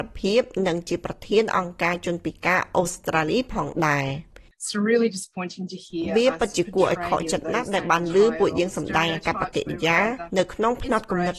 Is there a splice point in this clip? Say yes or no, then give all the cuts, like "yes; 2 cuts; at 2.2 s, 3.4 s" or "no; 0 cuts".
no; 0 cuts